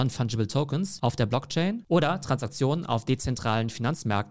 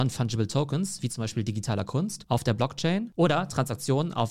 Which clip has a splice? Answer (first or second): first